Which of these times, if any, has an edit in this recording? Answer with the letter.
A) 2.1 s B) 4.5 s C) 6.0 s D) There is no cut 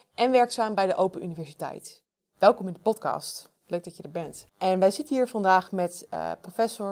B